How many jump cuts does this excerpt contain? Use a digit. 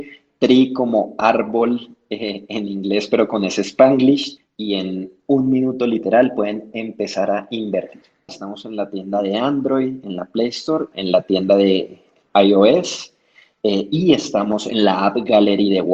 3